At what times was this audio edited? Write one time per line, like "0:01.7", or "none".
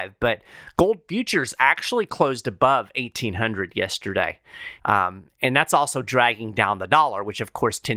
0:04.8